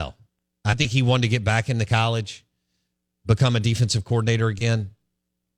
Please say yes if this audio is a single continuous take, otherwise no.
yes